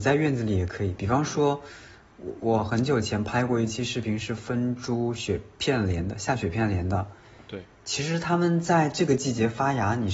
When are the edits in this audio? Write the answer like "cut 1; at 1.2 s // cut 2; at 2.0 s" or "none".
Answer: none